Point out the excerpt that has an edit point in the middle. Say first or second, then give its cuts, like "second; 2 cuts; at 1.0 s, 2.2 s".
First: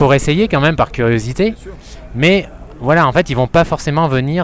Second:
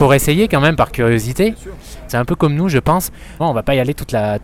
second; 2 cuts; at 2.1 s, 3.4 s